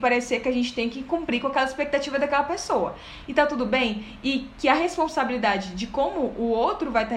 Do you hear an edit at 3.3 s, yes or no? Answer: yes